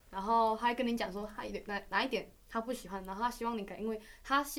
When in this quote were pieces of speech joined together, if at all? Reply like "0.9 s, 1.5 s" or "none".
none